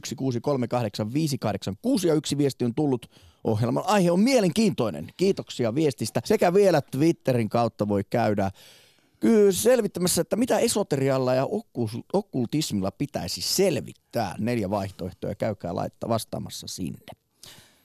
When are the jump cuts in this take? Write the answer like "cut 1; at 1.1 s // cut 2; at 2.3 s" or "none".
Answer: cut 1; at 6.2 s